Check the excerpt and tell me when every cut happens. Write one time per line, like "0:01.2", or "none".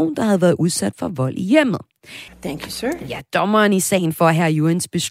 0:02.3